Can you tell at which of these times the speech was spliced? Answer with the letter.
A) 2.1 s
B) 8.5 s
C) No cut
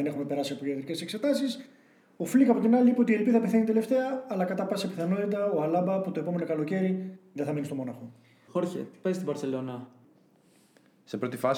B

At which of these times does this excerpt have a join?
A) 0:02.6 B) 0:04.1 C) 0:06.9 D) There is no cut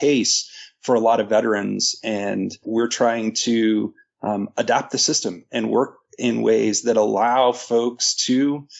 A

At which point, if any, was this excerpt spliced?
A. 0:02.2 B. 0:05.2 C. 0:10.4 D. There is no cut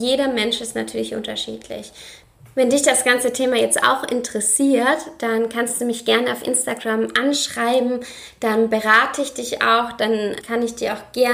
C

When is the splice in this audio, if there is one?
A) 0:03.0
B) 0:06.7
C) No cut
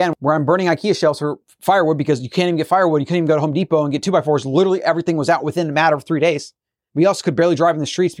C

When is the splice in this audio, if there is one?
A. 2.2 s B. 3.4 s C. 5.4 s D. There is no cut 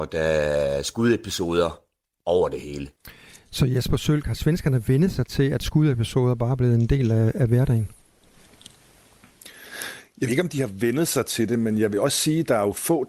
D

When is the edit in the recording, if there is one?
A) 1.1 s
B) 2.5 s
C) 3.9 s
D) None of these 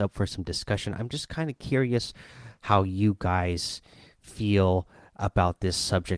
D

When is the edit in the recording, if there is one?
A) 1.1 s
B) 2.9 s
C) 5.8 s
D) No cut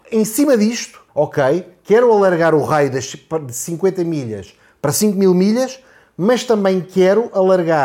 A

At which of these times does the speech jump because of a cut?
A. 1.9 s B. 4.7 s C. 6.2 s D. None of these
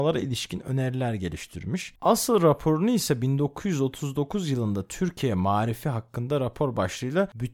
A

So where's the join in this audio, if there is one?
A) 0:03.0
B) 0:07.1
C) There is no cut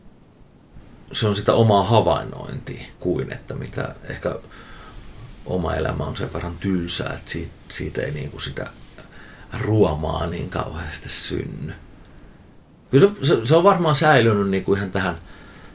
A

